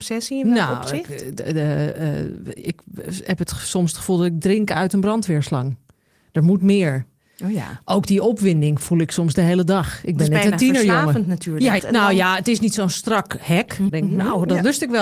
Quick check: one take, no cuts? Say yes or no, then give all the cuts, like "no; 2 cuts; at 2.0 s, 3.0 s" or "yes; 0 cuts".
no; 2 cuts; at 11.8 s, 13.9 s